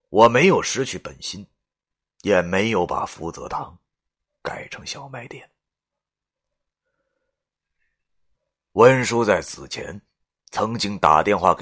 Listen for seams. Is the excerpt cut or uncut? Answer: uncut